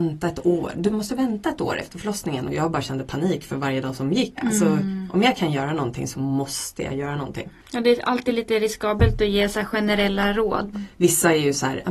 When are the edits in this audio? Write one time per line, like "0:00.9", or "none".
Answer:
0:04.4
0:07.6
0:10.7